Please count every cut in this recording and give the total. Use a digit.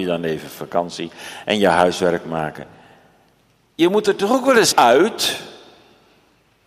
1